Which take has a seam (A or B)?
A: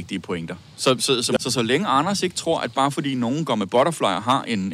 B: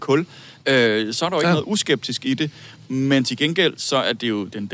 A